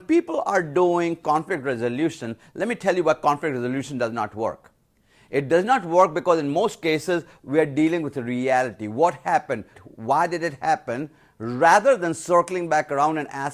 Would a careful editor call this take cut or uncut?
cut